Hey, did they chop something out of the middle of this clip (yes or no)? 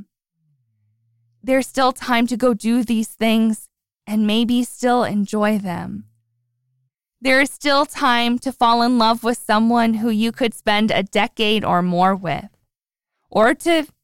no